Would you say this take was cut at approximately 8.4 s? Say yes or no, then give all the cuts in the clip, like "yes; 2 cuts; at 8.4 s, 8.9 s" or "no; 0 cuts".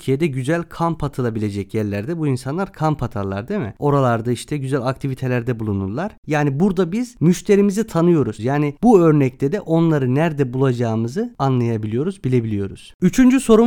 yes; 1 cut; at 8.4 s